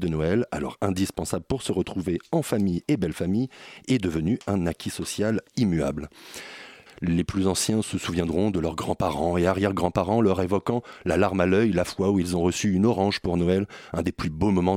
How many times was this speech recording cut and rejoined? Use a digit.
1